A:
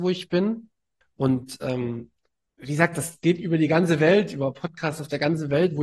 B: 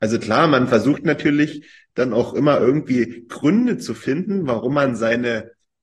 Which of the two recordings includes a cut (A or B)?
A